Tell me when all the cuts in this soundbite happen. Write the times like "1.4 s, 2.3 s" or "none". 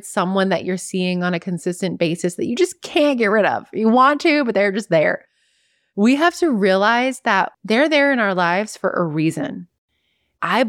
7.5 s